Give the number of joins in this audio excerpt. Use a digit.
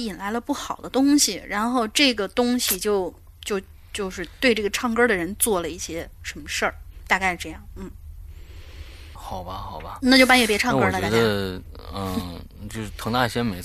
1